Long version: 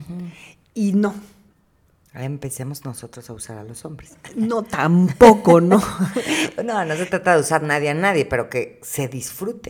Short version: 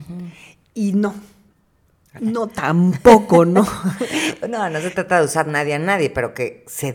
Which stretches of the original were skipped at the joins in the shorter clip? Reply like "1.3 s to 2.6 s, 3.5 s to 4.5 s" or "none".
2.2 s to 4.3 s